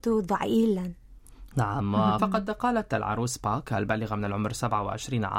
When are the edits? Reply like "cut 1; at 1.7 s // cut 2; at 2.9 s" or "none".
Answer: cut 1; at 2.2 s